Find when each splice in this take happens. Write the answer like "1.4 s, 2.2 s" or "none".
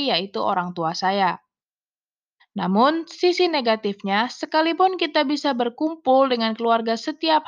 2.4 s